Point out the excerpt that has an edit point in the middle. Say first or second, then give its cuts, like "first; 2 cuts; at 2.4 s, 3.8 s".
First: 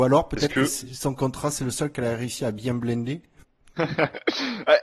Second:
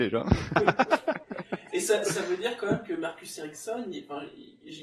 first; 1 cut; at 3.8 s